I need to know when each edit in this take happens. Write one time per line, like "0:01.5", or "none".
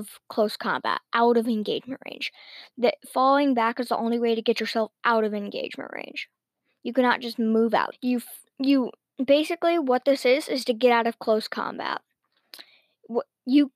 0:07.9